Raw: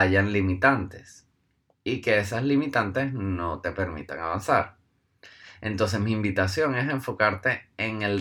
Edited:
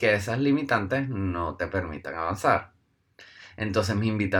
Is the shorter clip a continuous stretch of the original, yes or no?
yes